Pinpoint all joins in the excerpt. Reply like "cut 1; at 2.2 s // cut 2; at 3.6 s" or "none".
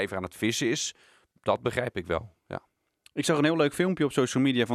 none